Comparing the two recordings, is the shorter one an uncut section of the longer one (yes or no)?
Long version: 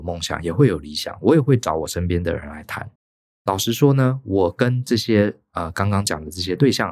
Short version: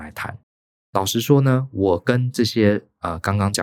yes